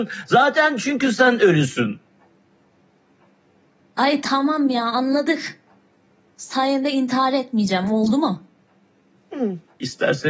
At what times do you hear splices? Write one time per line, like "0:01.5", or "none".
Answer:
0:04.2